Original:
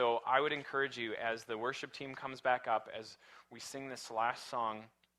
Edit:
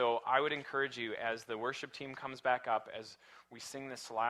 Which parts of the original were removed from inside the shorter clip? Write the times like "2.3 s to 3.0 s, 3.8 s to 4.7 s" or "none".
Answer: none